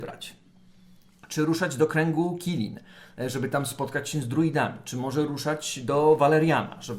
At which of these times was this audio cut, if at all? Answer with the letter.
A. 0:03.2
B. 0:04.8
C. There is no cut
C